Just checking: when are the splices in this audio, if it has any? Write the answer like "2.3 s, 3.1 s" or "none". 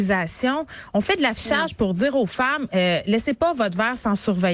none